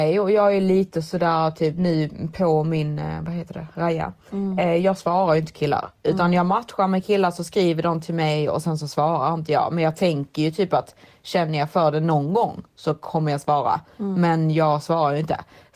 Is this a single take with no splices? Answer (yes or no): yes